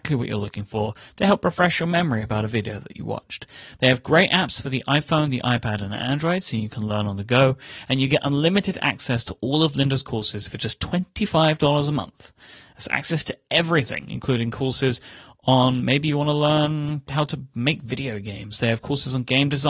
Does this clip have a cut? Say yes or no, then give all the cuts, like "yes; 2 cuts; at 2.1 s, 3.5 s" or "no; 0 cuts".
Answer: no; 0 cuts